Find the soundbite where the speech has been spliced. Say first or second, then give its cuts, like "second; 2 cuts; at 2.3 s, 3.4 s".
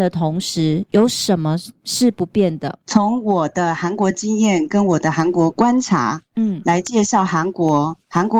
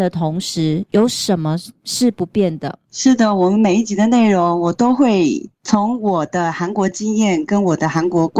first; 1 cut; at 2.8 s